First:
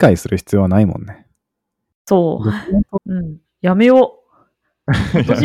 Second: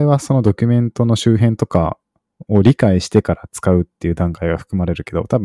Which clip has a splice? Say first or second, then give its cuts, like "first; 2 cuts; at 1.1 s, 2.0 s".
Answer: first; 1 cut; at 2.9 s